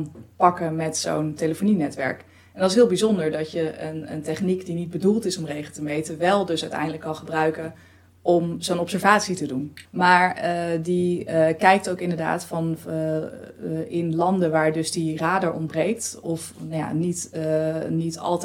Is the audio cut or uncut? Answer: cut